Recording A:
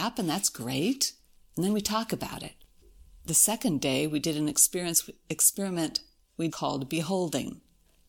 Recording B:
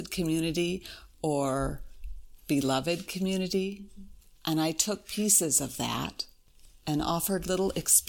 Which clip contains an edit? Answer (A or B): A